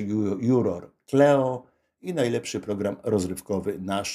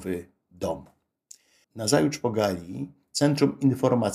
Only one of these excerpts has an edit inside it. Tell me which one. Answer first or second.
second